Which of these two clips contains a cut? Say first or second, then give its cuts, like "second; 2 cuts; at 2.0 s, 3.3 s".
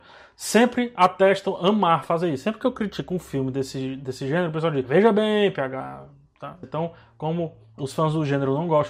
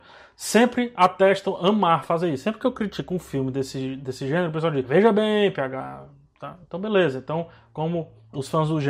first; 1 cut; at 6.6 s